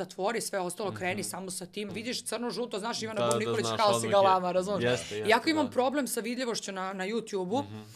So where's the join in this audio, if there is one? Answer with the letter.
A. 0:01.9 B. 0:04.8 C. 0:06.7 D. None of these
A